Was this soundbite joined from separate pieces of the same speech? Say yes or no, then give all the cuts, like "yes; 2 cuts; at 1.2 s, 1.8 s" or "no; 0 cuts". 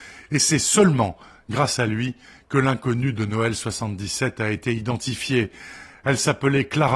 no; 0 cuts